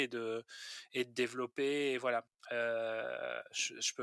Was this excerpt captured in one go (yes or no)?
no